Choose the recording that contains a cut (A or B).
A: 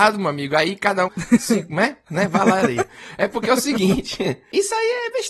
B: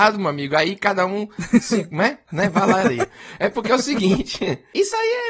A